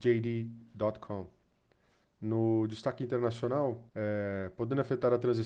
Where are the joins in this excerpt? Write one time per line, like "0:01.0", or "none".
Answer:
0:02.0
0:03.9